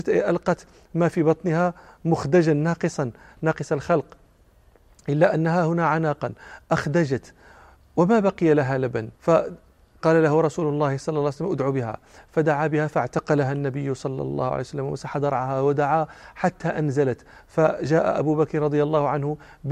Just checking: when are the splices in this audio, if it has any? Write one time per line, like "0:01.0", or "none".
0:09.1